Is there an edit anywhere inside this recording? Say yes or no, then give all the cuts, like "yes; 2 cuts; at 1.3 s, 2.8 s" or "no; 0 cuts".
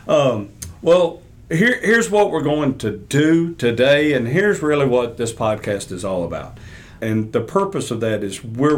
yes; 1 cut; at 7.0 s